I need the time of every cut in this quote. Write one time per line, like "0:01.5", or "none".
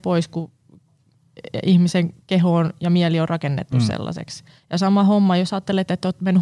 none